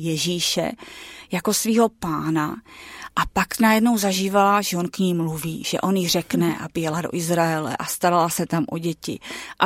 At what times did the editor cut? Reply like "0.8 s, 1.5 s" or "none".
none